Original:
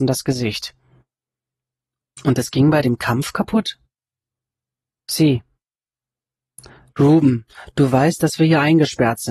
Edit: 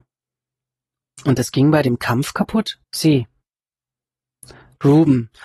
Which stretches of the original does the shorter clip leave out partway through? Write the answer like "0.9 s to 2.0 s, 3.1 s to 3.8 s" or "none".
3.8 s to 5.0 s